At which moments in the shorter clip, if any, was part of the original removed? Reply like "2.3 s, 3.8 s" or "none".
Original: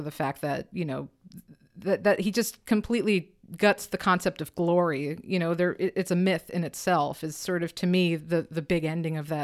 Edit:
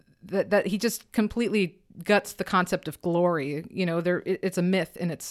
none

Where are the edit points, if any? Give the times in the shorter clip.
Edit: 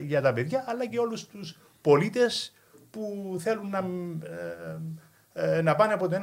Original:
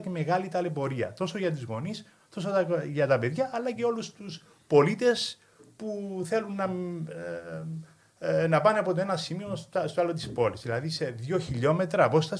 none

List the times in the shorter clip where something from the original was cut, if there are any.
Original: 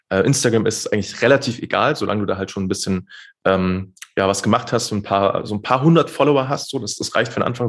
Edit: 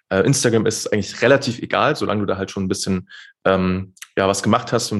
none

